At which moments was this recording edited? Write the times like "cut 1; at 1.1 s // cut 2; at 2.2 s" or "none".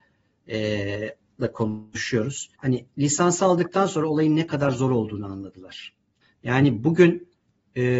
cut 1; at 2.5 s // cut 2; at 6.2 s